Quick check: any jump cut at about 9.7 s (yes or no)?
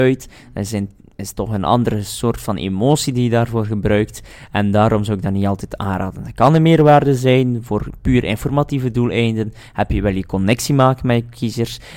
no